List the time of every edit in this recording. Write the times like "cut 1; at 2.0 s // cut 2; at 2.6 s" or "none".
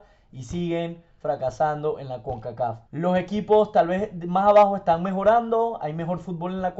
cut 1; at 2.9 s